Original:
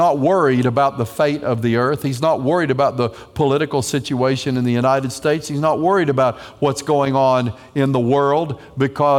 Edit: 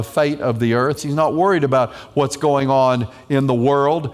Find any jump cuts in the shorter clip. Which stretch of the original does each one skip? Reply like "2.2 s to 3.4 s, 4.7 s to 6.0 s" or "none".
2.0 s to 5.4 s